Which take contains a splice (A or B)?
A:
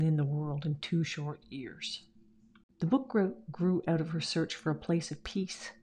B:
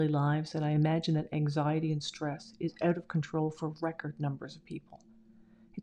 A